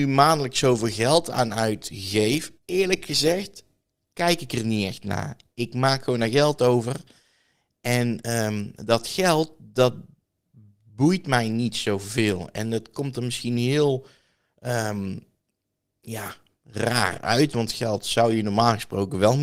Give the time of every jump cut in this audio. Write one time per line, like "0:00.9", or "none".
0:02.6